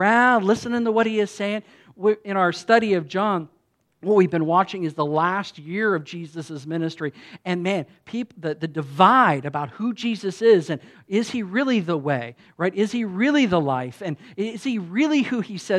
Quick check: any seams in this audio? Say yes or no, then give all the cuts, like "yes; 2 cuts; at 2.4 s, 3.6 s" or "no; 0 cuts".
no; 0 cuts